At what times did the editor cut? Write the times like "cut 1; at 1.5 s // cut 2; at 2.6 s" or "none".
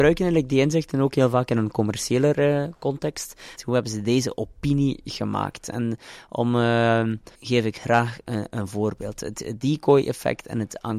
cut 1; at 3.6 s // cut 2; at 7.4 s